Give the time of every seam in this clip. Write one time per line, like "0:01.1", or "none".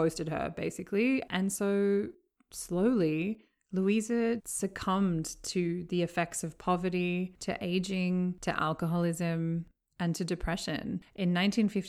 0:04.4